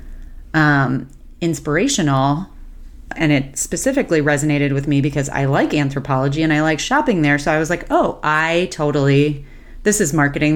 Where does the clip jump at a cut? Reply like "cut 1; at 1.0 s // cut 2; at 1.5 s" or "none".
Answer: cut 1; at 3.1 s